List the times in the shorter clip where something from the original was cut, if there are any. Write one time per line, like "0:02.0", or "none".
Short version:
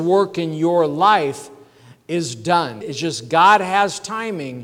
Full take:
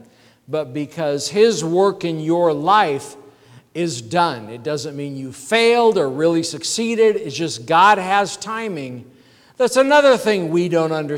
0:02.8